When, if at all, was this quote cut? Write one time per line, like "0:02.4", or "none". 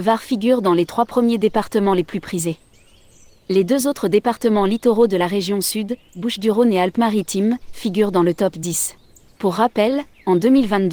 0:09.4